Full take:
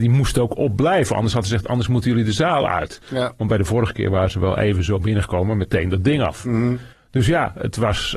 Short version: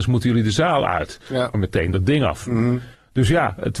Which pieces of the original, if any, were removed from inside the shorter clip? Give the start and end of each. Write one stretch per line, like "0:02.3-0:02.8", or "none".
0:03.4-0:05.5